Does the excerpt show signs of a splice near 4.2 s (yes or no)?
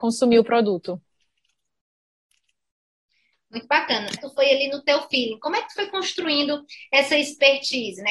yes